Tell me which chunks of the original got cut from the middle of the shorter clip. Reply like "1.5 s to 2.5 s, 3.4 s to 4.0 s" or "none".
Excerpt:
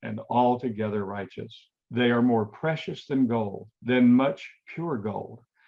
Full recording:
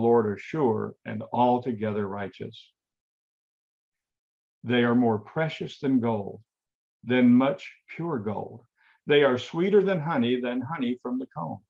2.8 s to 4.5 s, 6.4 s to 6.9 s